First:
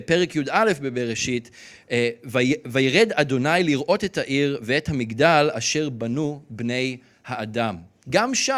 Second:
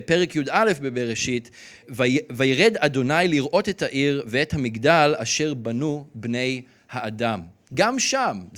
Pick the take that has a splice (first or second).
second